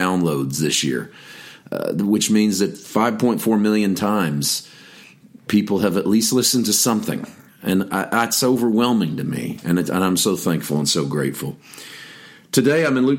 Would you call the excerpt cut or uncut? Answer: uncut